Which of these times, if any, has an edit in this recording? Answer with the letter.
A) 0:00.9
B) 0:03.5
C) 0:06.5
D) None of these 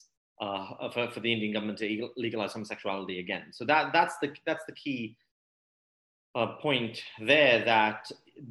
D